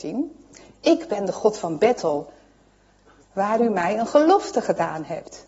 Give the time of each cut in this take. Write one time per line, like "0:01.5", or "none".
0:03.2